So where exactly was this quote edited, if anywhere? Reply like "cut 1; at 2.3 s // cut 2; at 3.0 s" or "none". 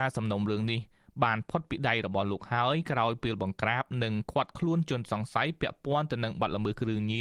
none